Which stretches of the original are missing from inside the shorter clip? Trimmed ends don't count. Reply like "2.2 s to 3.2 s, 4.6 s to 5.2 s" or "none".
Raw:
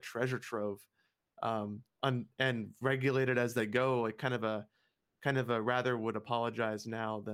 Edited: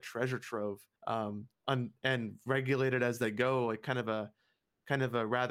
1.0 s to 1.3 s